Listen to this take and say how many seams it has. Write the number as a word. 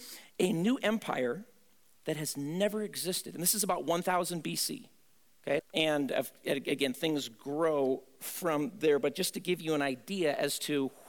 one